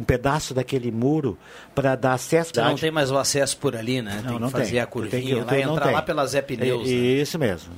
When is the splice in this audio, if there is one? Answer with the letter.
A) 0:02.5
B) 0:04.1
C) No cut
A